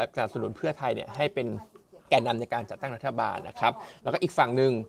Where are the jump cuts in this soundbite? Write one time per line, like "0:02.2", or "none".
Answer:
0:02.0